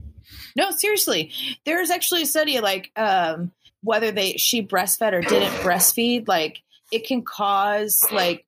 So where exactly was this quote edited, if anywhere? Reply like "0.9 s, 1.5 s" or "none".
3.7 s